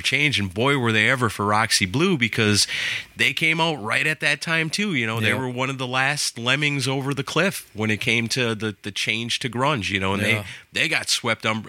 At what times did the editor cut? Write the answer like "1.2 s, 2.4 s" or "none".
none